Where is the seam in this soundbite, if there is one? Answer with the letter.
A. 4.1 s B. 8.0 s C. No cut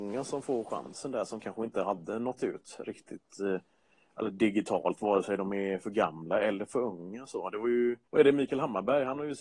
B